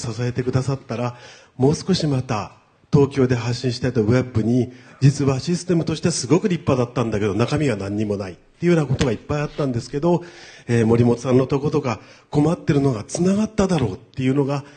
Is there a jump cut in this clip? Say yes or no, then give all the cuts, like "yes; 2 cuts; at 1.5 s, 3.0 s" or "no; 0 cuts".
no; 0 cuts